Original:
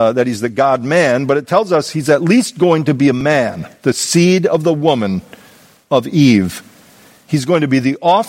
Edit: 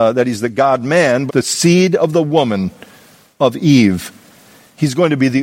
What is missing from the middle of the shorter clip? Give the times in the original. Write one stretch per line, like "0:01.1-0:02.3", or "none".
0:01.3-0:03.8